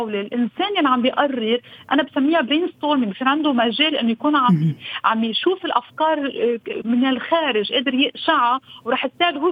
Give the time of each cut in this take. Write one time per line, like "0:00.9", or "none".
0:06.8